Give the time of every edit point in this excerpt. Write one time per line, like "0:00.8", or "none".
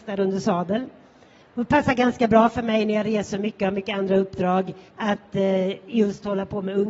0:01.4
0:04.9